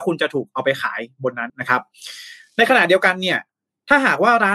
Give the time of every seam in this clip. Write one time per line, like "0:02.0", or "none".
0:01.5